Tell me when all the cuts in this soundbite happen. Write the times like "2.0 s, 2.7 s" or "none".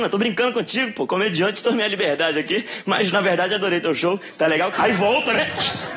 4.7 s

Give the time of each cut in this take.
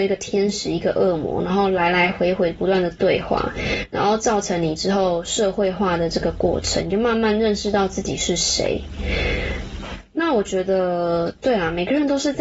none

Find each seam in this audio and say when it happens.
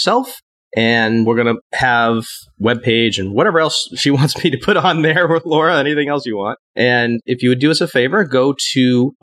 7.2 s

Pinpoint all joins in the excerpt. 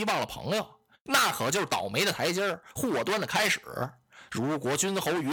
none

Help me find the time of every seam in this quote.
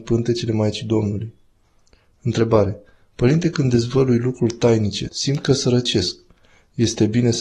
5.1 s

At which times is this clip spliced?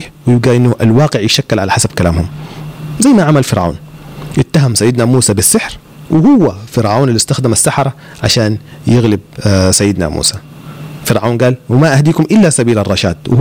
none

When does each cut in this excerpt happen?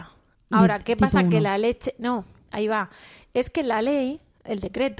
none

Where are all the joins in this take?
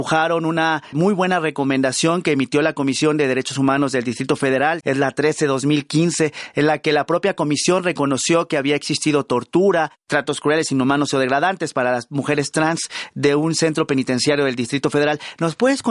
0.9 s, 4.8 s

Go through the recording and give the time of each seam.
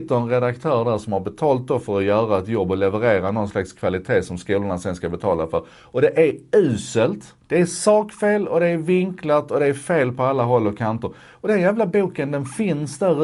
7.4 s

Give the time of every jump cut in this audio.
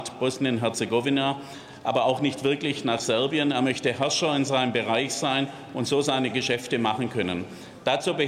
none

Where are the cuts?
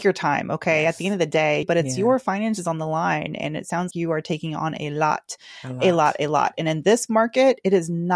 1.6 s, 3.9 s

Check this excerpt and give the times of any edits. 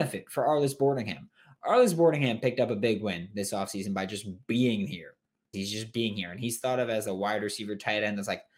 5.5 s

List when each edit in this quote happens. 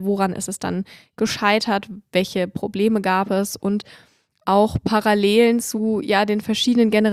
none

